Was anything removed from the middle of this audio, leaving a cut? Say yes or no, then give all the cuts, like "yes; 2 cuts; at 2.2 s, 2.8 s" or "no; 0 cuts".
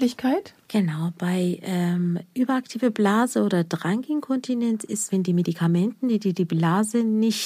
yes; 1 cut; at 5.1 s